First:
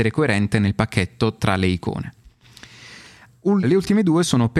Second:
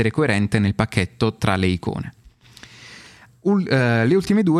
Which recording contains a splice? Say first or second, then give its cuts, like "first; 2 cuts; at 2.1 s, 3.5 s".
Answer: first; 1 cut; at 3.6 s